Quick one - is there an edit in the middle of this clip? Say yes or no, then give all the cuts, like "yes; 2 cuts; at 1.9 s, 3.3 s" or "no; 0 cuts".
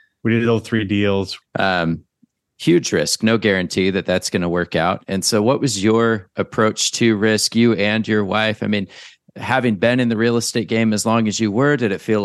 yes; 1 cut; at 1.4 s